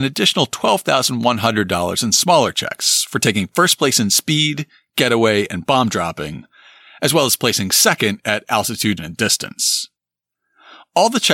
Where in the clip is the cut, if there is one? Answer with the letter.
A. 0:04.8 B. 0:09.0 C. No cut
B